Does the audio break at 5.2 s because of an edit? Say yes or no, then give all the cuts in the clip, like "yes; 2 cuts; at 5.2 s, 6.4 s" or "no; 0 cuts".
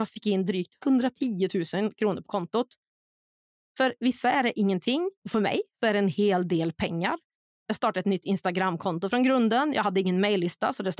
yes; 2 cuts; at 5.2 s, 7.5 s